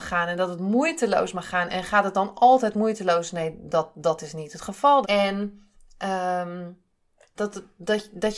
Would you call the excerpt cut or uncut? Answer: cut